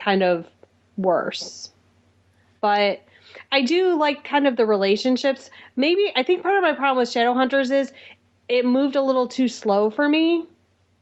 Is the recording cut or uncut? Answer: uncut